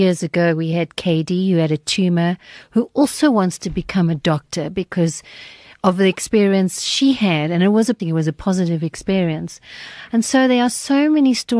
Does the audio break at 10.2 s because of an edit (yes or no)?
no